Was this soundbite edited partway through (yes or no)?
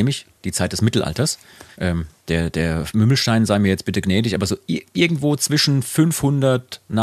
yes